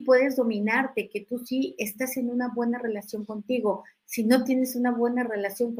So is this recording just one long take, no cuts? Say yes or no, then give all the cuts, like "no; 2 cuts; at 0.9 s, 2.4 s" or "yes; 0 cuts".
yes; 0 cuts